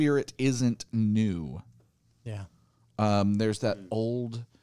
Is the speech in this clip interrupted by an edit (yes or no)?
no